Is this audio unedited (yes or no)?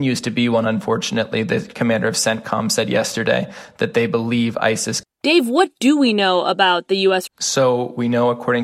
no